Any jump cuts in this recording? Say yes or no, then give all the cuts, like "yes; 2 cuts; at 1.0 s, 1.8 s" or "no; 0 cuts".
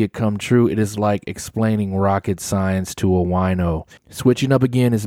yes; 1 cut; at 4.0 s